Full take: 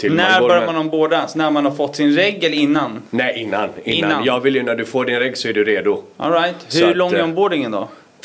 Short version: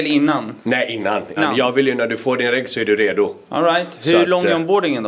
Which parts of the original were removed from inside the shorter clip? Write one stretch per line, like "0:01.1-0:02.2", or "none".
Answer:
0:03.8-0:04.0

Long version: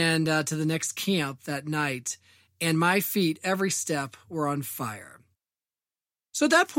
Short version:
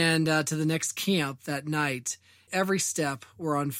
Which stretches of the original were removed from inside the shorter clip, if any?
0:02.5-0:03.4

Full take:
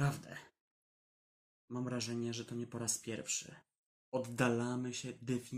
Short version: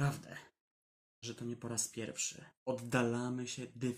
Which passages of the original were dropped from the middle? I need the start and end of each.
0:01.2-0:02.3
0:03.7-0:04.0

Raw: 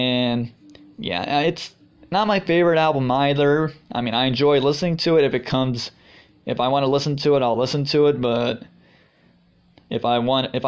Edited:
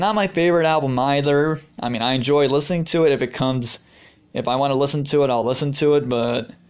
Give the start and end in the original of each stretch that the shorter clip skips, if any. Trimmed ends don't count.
none

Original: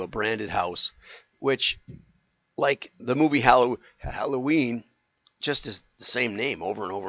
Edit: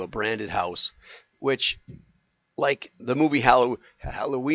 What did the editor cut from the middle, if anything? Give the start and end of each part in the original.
none

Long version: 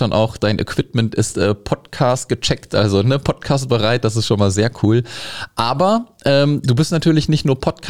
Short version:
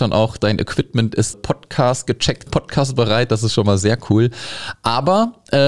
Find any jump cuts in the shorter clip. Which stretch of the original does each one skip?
0:01.3-0:01.6
0:02.7-0:03.2

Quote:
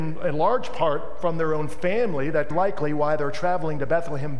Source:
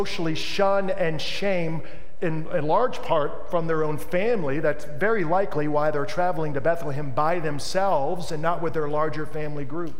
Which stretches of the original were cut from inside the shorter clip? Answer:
0:04.8-0:05.2

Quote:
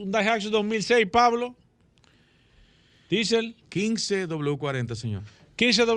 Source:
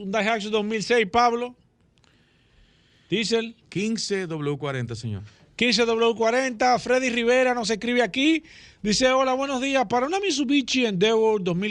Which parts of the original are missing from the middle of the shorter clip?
none

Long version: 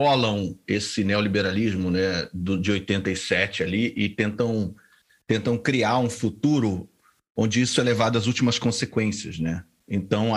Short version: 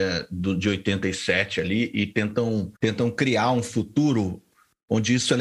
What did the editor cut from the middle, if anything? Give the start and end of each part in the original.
0:04.8-0:05.2

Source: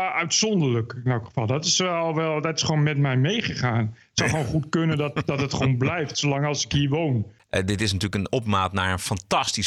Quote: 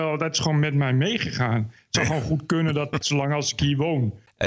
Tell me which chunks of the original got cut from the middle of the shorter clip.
0:05.2-0:06.1

